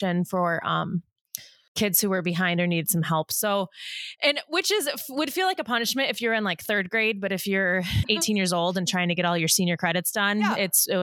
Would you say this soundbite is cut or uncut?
cut